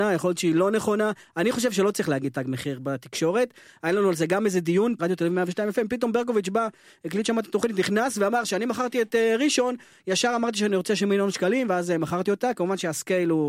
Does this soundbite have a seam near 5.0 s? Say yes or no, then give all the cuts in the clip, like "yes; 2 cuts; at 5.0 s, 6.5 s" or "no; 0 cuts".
yes; 1 cut; at 5.0 s